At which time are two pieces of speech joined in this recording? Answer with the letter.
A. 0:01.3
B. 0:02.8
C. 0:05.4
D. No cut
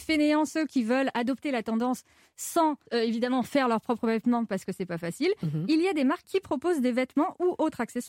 B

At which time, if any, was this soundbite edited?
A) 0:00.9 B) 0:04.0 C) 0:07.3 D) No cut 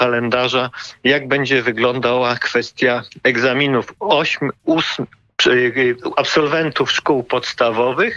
B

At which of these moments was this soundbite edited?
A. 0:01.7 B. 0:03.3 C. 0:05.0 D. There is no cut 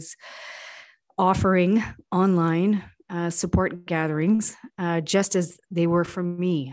D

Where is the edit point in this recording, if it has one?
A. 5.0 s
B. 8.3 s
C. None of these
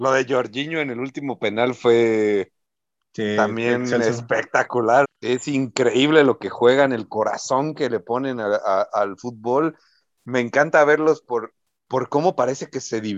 A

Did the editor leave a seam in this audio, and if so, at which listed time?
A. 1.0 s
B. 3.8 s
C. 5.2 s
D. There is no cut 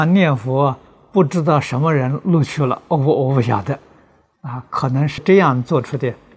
C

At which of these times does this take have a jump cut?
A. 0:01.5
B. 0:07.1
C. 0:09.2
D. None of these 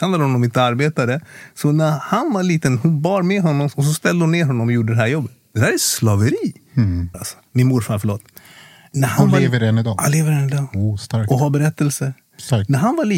B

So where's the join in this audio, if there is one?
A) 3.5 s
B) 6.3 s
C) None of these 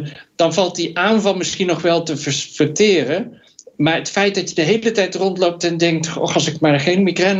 C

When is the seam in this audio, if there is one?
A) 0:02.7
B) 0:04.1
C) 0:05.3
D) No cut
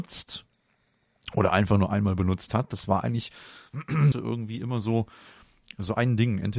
B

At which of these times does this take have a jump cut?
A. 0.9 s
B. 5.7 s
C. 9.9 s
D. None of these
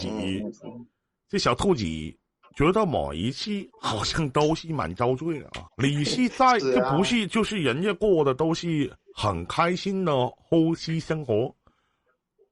B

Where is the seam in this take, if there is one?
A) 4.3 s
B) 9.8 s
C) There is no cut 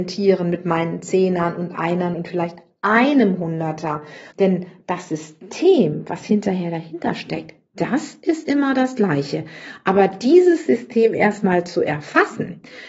A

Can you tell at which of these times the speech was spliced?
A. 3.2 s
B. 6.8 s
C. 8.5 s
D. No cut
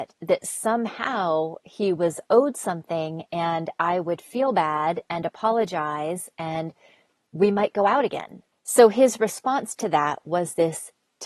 C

